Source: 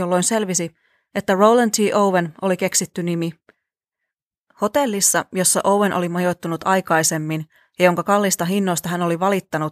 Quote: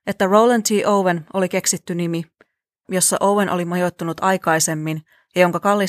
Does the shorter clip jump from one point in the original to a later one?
yes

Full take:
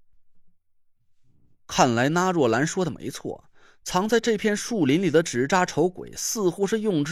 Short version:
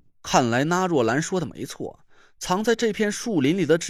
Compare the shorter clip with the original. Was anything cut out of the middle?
no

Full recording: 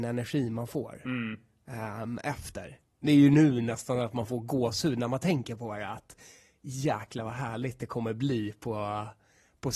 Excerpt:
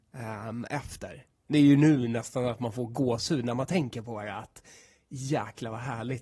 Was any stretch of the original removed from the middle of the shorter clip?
no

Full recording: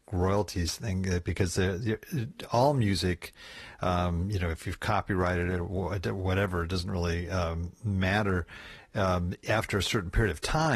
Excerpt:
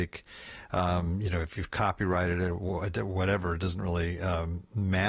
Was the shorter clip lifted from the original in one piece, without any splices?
yes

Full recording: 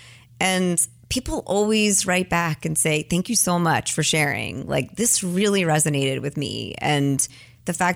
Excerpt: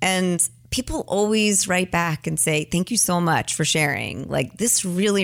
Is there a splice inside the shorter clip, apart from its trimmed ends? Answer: no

